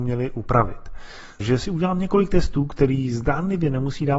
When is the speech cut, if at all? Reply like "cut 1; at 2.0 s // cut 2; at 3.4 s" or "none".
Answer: cut 1; at 1.4 s